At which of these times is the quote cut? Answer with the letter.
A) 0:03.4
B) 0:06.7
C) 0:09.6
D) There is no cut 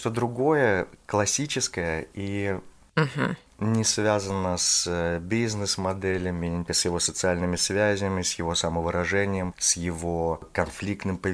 B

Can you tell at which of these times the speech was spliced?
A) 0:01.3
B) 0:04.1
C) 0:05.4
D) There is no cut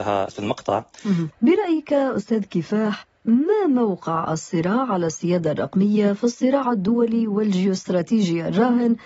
A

